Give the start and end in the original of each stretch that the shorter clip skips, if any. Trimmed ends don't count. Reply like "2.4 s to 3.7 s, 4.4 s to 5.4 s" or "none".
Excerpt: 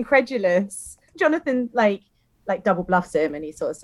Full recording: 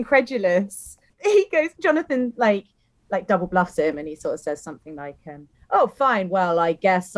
1.1 s to 1.7 s